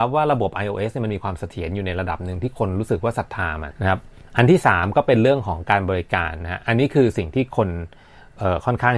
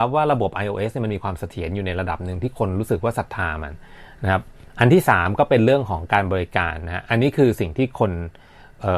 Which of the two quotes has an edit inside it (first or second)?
first